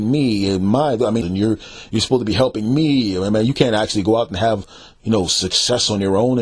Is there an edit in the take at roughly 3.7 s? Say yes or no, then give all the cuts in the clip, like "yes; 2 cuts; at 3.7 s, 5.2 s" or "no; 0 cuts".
no; 1 cut; at 1.2 s